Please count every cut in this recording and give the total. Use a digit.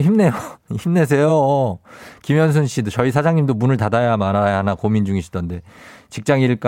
0